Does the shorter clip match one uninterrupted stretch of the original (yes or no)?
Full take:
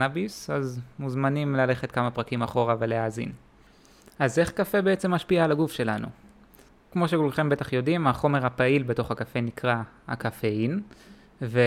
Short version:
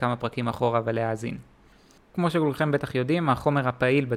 no